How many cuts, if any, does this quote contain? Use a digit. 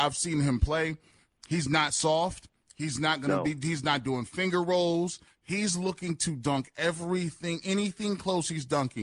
2